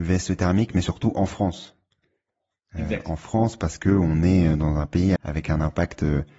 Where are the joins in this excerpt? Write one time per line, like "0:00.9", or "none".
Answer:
0:05.2